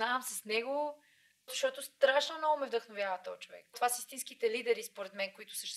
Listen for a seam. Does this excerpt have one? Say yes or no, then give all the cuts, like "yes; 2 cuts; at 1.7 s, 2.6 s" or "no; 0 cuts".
yes; 2 cuts; at 1.5 s, 3.7 s